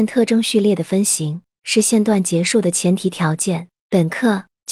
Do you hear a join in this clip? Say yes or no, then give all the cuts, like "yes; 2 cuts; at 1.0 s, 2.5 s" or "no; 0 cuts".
no; 0 cuts